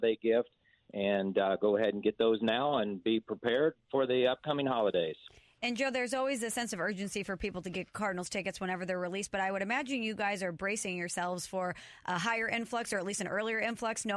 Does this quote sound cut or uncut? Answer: uncut